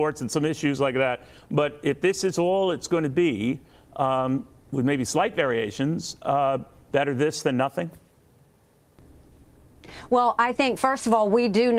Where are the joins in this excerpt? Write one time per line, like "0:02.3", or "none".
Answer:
none